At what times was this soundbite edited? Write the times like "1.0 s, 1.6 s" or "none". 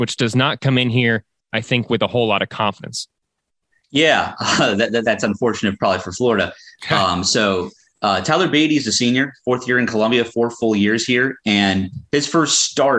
5.0 s